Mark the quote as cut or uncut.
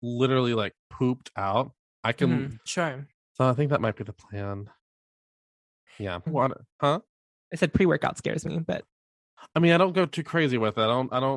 cut